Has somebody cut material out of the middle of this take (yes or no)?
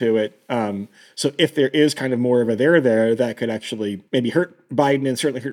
yes